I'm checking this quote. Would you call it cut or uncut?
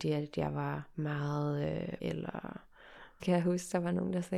cut